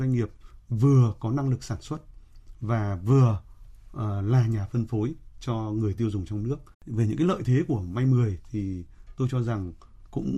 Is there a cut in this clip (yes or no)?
yes